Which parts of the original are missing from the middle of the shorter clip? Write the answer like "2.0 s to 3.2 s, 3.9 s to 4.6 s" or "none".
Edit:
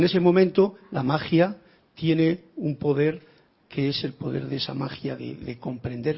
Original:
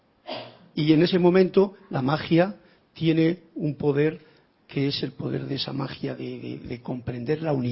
6.2 s to 6.4 s